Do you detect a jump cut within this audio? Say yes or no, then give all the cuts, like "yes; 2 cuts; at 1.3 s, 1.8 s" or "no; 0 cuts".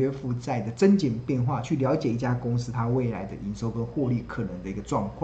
no; 0 cuts